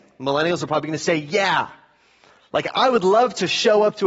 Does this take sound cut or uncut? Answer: uncut